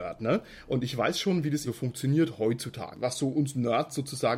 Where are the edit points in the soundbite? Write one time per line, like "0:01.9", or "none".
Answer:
0:01.6